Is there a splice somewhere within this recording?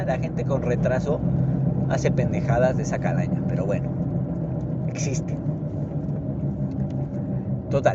no; 0 cuts

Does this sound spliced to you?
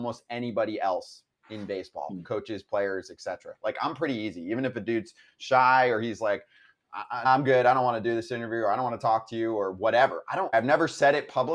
yes; 2 cuts; at 7.2 s, 10.5 s

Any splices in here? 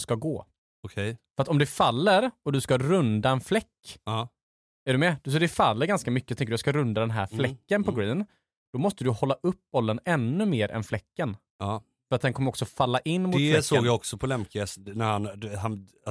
no; 0 cuts

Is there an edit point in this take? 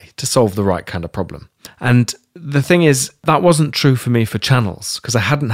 no; 0 cuts

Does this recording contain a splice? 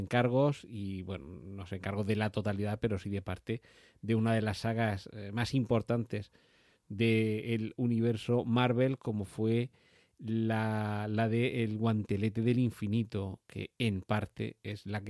no; 0 cuts

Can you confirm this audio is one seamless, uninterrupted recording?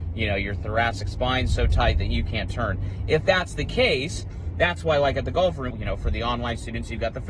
no; 1 cut; at 5.7 s

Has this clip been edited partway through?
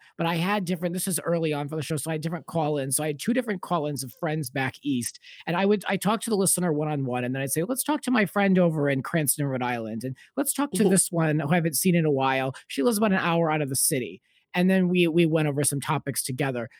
no; 0 cuts

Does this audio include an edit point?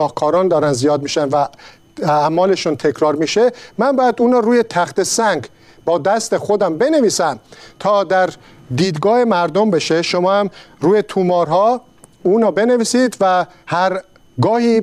no; 0 cuts

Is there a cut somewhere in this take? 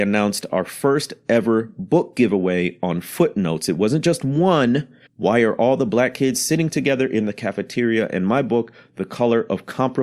yes; 1 cut; at 5.1 s

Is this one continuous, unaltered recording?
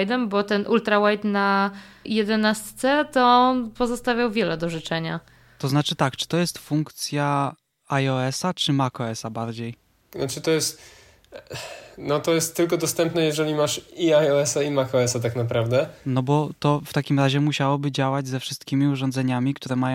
no; 1 cut; at 9.9 s

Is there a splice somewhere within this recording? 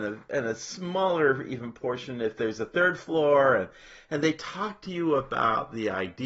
no; 0 cuts

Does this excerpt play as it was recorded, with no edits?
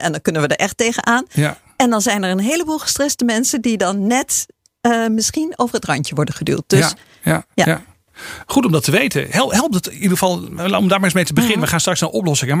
yes; 0 cuts

